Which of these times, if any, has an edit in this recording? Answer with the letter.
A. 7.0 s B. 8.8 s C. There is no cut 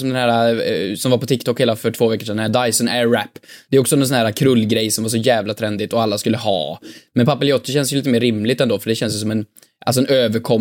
C